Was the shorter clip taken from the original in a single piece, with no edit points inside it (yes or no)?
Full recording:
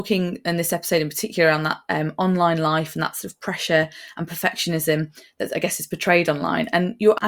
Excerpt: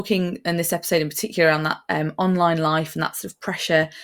yes